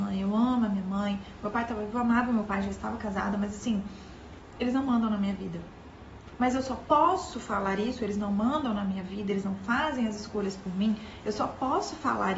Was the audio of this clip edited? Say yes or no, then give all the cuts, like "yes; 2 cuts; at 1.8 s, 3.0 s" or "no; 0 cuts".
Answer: no; 0 cuts